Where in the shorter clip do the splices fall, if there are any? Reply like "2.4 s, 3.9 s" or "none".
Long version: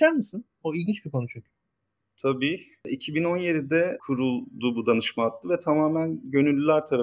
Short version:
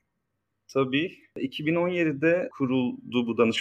none